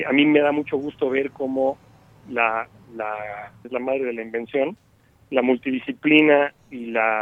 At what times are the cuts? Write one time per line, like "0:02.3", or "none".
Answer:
0:03.6